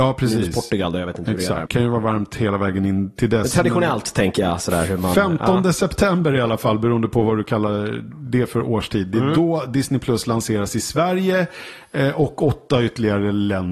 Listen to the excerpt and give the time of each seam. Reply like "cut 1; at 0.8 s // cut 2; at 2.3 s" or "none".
cut 1; at 1.7 s